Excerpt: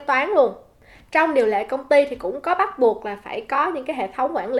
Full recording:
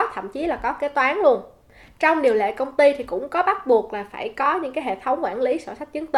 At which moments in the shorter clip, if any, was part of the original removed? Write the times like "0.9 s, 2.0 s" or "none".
none